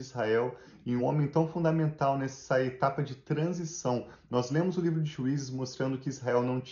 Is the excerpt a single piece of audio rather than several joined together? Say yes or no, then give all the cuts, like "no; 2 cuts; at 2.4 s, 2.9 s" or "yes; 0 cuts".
no; 1 cut; at 1.0 s